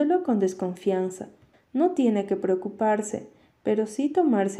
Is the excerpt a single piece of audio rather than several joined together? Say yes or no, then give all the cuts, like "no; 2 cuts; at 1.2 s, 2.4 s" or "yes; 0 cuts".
no; 1 cut; at 1.5 s